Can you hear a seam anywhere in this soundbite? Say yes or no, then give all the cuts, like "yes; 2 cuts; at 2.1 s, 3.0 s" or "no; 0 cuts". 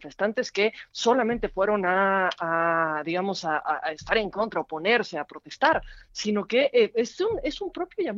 no; 0 cuts